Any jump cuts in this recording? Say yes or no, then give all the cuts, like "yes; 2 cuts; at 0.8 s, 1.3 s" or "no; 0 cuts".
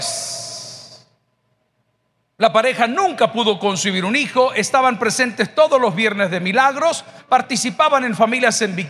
yes; 2 cuts; at 2.3 s, 7.2 s